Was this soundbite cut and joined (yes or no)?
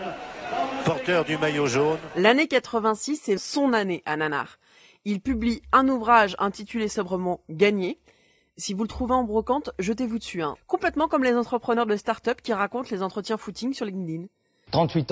yes